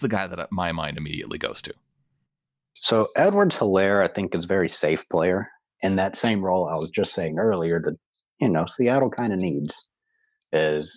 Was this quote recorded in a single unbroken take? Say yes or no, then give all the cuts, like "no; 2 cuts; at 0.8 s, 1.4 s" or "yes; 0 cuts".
no; 1 cut; at 5.7 s